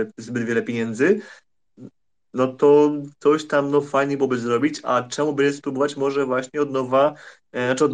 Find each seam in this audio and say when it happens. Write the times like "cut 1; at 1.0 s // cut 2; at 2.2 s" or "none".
none